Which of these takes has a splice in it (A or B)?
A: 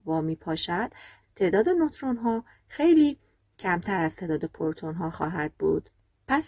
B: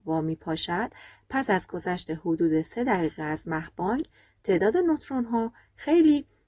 A